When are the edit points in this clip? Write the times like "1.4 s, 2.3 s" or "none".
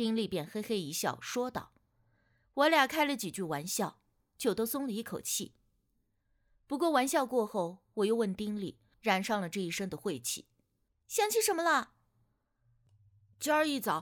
8.9 s, 10.9 s